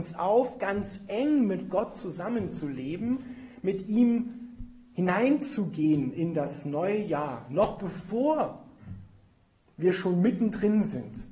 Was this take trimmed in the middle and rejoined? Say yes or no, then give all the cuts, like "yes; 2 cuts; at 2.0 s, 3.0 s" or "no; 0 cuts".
no; 0 cuts